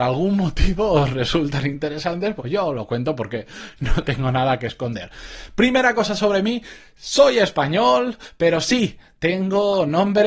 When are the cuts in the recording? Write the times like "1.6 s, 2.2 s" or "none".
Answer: 2.4 s